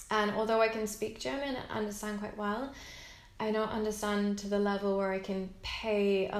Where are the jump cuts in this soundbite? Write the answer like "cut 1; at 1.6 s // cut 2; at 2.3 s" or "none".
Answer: none